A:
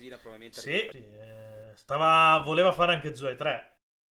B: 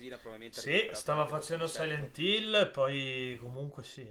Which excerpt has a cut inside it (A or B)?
A